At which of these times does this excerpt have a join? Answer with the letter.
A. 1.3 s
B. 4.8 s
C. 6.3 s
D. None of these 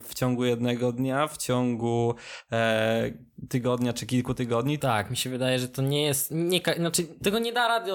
B